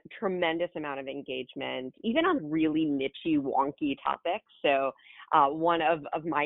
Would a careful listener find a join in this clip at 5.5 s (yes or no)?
no